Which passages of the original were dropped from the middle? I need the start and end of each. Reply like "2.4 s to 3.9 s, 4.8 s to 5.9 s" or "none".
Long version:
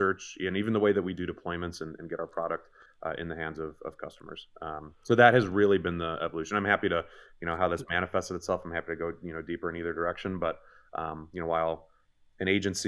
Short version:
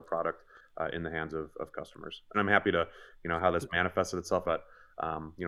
4.6 s to 6.5 s, 8.6 s to 10.4 s